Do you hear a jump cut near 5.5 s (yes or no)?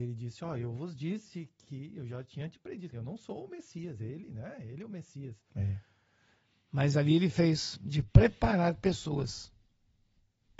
yes